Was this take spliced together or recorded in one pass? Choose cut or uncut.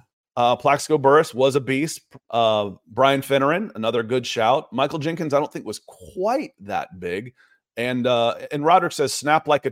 cut